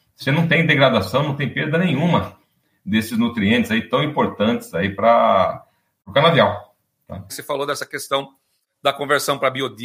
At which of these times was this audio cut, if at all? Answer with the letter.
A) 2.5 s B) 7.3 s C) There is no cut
B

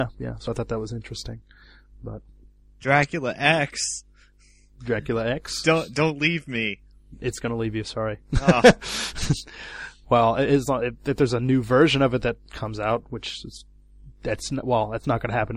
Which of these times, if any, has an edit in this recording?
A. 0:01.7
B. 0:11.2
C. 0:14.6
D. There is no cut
D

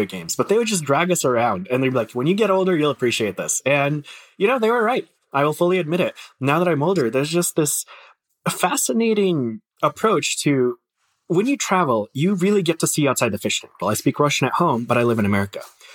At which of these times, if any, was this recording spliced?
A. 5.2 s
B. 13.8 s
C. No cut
B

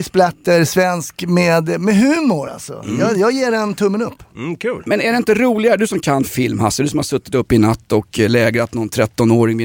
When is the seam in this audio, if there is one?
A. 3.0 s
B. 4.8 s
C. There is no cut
C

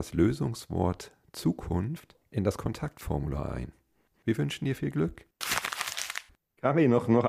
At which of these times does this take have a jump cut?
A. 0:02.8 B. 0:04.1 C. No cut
B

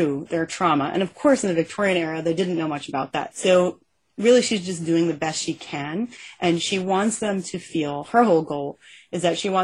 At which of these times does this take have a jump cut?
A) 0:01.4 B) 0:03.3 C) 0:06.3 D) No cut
B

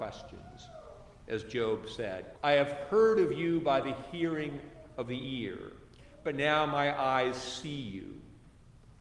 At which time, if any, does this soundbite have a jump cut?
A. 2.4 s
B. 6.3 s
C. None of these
A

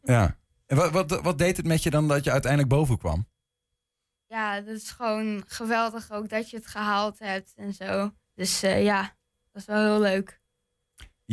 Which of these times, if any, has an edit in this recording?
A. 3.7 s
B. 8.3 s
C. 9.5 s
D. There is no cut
B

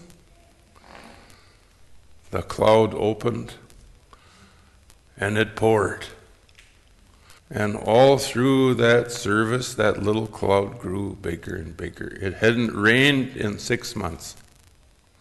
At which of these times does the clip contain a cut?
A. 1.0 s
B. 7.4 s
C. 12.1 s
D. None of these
B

